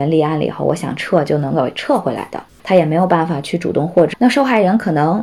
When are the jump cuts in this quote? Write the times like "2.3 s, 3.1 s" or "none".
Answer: 2.6 s, 4.1 s